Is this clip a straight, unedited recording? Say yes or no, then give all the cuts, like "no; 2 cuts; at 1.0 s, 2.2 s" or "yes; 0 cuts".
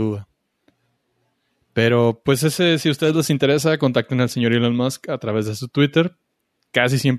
yes; 0 cuts